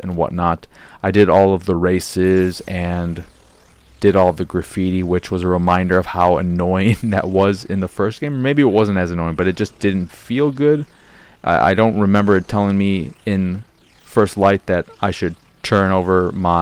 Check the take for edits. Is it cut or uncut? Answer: uncut